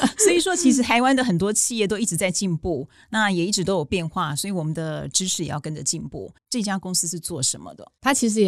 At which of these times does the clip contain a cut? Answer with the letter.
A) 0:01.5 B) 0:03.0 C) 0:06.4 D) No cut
C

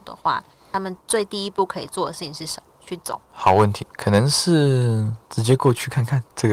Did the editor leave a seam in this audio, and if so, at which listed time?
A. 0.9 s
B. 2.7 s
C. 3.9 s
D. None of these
B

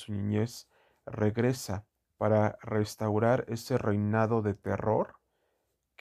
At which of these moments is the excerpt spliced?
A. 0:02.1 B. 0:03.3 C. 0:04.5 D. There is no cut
A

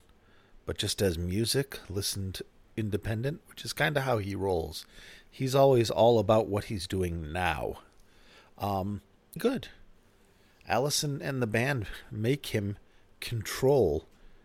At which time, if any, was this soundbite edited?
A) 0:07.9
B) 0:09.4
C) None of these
B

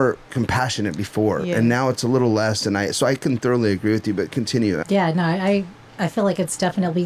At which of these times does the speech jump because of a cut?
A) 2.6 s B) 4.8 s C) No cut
B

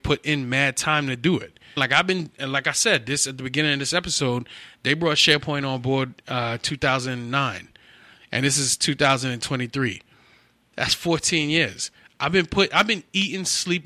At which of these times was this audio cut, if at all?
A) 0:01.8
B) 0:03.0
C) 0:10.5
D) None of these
A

